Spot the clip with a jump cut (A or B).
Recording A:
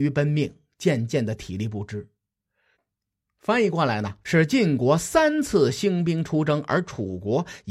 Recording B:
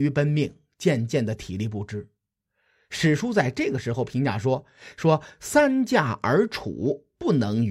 A